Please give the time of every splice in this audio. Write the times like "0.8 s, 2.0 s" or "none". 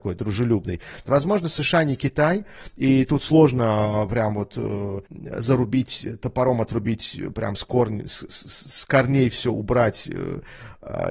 1.1 s, 5.1 s